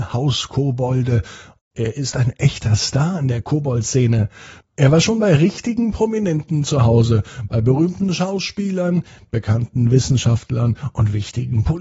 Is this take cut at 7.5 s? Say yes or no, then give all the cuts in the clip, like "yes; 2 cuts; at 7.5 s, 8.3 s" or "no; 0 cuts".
no; 2 cuts; at 1.6 s, 4.6 s